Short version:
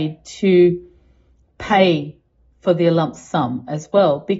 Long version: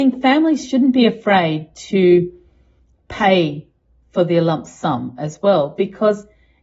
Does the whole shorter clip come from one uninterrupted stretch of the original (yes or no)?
yes